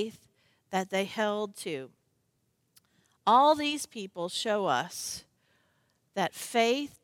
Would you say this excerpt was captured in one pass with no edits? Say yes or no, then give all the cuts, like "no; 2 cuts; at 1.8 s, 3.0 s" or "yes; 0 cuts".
yes; 0 cuts